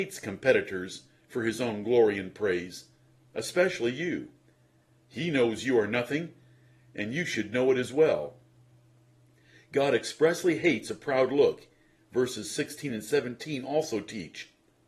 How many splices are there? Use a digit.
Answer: 1